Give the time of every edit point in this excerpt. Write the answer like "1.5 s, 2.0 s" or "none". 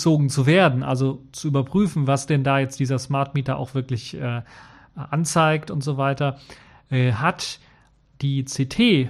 none